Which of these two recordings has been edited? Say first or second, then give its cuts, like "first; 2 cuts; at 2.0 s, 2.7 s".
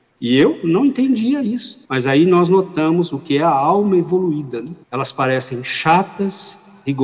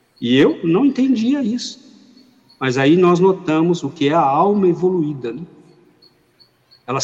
first; 2 cuts; at 1.8 s, 4.8 s